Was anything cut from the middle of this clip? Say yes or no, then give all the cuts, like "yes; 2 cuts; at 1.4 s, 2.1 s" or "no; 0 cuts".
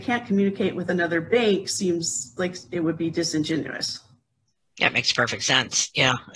no; 0 cuts